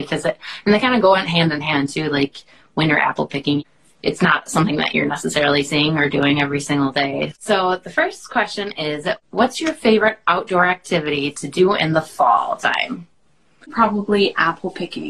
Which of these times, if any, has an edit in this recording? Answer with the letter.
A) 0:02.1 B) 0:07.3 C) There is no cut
B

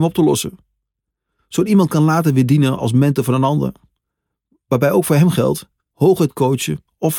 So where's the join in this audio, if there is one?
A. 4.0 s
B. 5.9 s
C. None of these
B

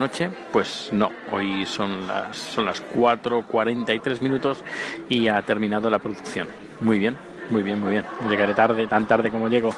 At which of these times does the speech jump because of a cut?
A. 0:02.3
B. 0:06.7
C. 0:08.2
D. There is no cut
A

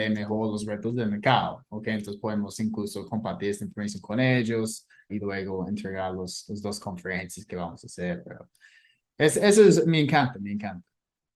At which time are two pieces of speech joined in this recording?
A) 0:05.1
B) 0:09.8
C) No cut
A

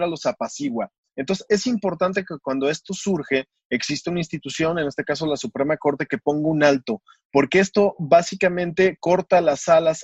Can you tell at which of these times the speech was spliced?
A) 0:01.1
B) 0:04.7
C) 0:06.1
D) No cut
A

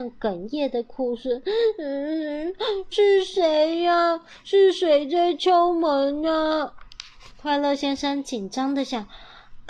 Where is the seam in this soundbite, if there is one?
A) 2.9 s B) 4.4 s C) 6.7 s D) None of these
A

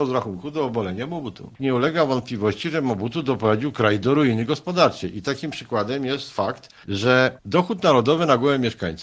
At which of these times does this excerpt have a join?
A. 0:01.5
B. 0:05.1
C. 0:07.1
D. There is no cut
A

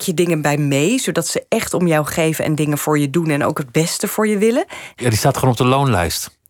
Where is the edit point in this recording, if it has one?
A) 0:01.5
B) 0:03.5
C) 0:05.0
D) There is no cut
C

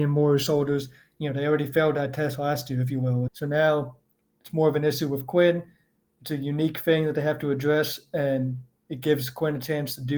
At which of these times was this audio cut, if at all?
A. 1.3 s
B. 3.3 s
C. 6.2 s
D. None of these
B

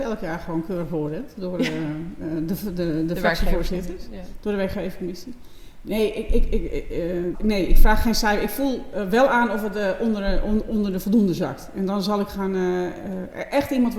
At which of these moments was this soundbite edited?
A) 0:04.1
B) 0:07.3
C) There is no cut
B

